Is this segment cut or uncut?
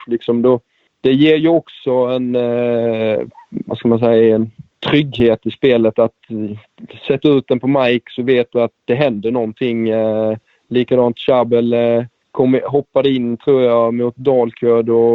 uncut